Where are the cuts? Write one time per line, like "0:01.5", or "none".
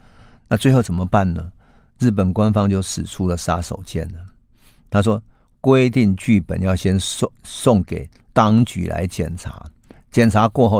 none